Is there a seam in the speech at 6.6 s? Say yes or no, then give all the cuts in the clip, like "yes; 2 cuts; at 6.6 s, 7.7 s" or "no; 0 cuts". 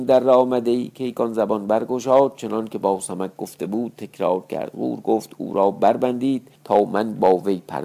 yes; 1 cut; at 6.6 s